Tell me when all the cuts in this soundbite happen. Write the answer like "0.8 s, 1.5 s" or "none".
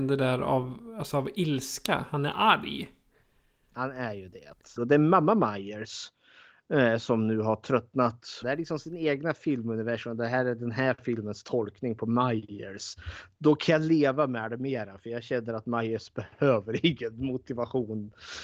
4.8 s, 8.4 s

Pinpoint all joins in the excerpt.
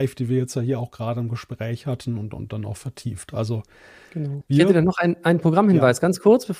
4.4 s

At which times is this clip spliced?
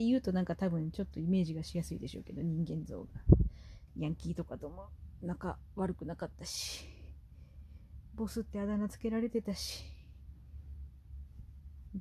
3.9 s

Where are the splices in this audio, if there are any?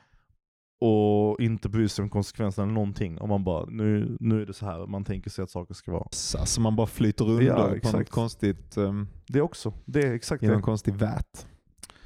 3.7 s, 6.1 s

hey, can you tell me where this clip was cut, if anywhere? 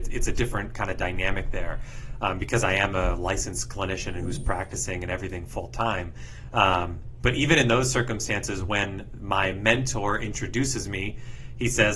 none

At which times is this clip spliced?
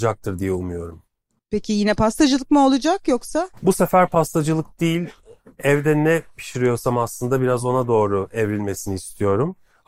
none

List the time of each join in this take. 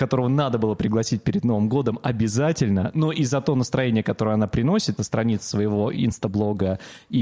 5.0 s

